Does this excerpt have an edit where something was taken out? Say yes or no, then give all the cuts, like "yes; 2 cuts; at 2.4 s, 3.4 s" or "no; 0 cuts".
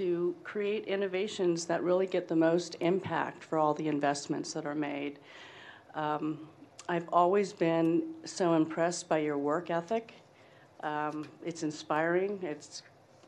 no; 0 cuts